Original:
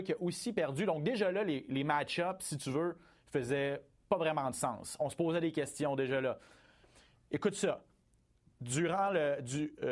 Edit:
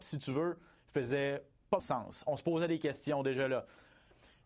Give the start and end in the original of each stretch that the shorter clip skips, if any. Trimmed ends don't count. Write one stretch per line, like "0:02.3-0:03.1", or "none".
0:04.2-0:04.5